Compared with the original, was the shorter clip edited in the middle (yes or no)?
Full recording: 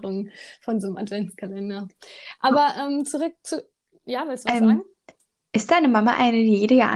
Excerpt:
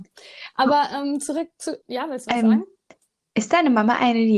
yes